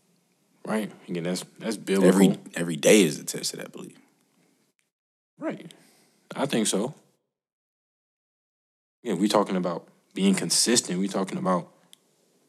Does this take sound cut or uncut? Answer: uncut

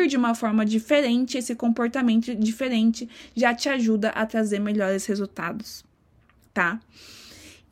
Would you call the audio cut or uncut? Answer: uncut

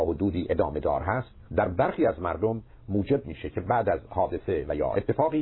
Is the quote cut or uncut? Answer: cut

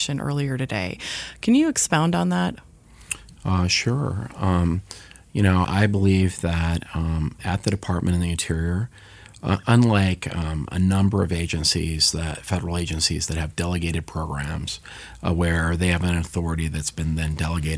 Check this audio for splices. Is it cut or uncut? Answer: cut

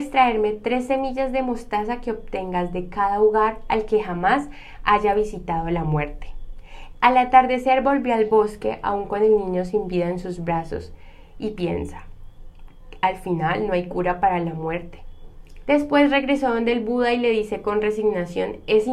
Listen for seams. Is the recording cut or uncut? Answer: cut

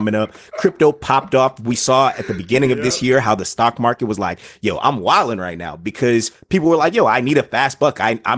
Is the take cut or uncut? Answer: uncut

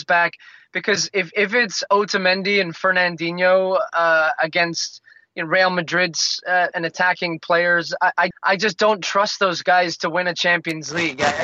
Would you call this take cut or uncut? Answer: cut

